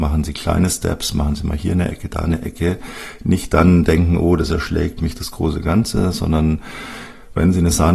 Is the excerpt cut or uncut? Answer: uncut